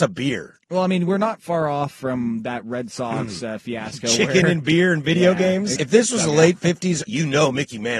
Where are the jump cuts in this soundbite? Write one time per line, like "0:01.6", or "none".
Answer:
0:05.8
0:07.0